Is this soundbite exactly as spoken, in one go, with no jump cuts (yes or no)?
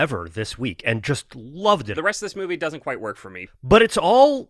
no